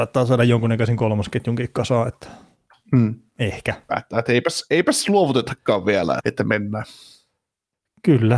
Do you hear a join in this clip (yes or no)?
yes